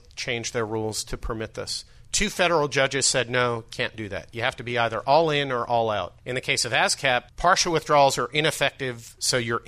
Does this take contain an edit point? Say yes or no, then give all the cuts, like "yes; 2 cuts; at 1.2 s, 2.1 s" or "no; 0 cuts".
yes; 2 cuts; at 6.2 s, 7.3 s